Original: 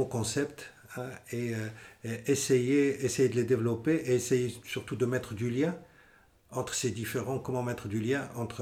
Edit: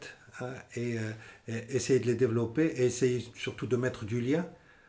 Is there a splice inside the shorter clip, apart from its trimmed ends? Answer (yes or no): yes